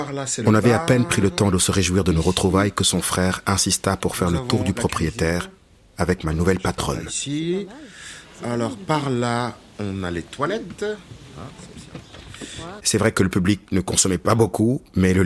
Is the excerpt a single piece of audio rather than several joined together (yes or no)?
no